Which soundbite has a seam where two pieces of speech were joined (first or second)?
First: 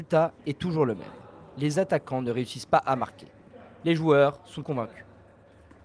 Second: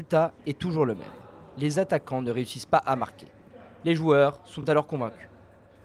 first